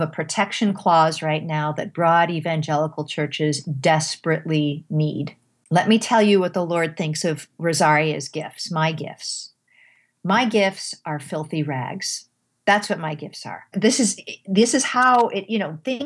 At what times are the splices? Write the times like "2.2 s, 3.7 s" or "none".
13.7 s